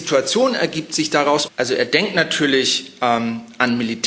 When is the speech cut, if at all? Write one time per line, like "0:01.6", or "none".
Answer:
0:01.5